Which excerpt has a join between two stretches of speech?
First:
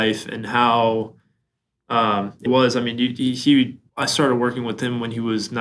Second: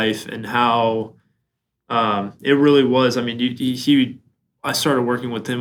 first; 2 cuts; at 2.5 s, 3.9 s

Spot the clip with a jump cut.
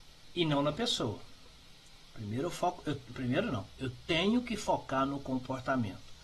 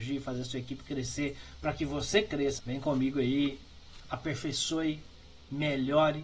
second; 2 cuts; at 2.6 s, 4.0 s

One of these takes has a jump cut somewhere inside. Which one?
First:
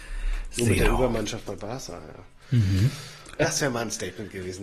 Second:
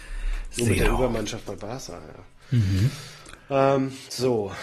first; 1 cut; at 3.4 s

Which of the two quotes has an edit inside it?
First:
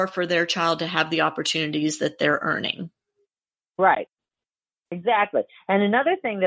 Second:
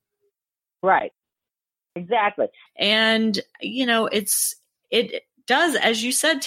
second; 1 cut; at 2.7 s

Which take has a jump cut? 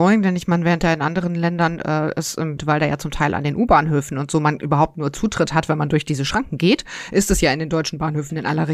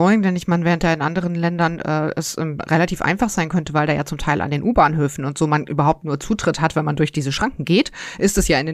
first; 1 cut; at 2.6 s

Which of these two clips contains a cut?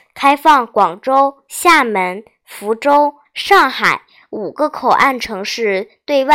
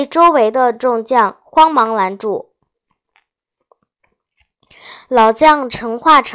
first; 1 cut; at 3.3 s

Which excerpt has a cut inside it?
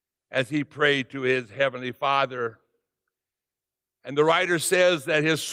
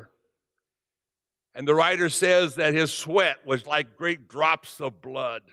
second; 1 cut; at 3.6 s

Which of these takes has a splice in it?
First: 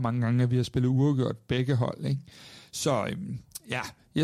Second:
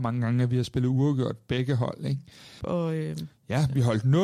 second; 1 cut; at 2.6 s

